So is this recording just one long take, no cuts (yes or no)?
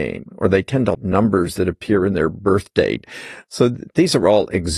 no